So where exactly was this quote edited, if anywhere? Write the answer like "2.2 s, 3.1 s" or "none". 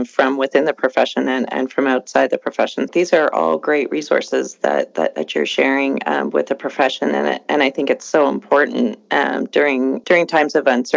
2.9 s, 10.0 s